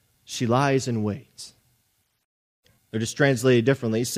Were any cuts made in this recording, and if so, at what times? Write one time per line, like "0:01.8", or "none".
0:02.8

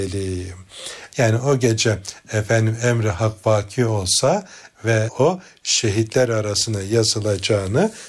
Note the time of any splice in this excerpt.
0:01.1

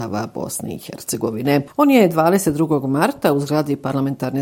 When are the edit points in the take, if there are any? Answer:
0:01.7

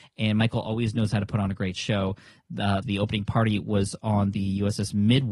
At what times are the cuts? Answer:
0:02.8

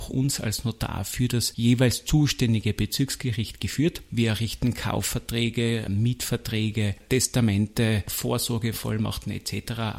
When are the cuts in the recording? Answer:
0:04.1

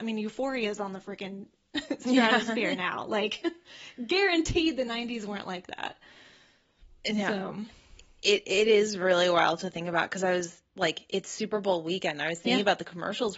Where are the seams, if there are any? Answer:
none

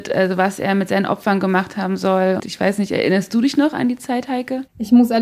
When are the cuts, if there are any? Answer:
0:02.4

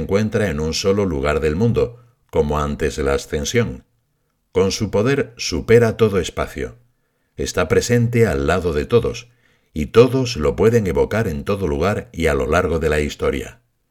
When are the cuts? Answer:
none

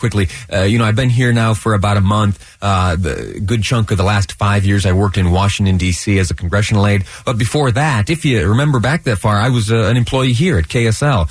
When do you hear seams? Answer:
none

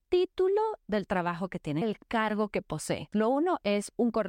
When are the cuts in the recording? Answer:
0:01.8
0:03.1

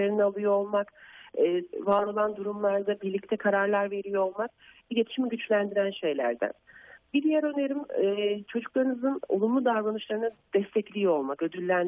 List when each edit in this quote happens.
0:01.7

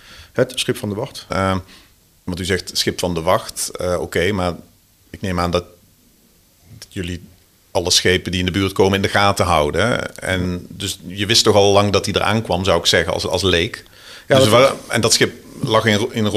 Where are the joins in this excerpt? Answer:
0:01.3

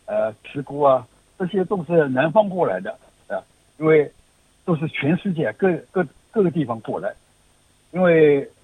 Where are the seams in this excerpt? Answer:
0:03.6

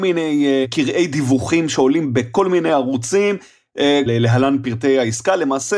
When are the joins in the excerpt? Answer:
0:04.1

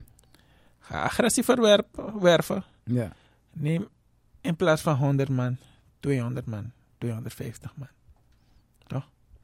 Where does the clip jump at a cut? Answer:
none

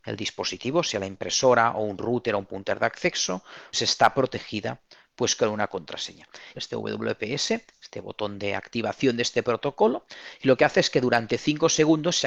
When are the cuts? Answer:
0:03.7
0:06.5

